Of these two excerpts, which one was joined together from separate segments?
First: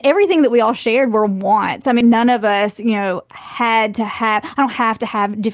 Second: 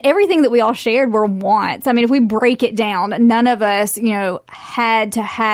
first; 1 cut; at 2.0 s

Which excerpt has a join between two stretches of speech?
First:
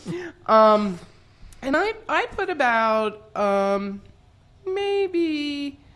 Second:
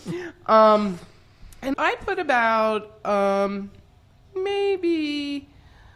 second; 1 cut; at 1.7 s

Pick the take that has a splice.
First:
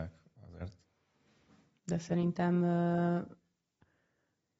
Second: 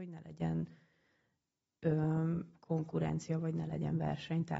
first; 1 cut; at 1.8 s

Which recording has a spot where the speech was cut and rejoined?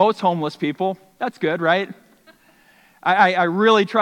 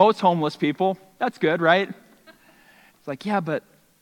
second; 1 cut; at 2.9 s

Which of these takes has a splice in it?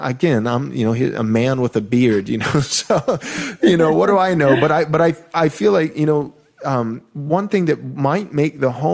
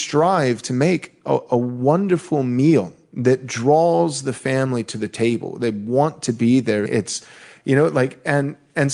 second; 1 cut; at 6.9 s

